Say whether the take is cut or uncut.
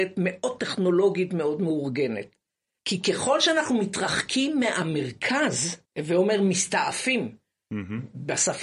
cut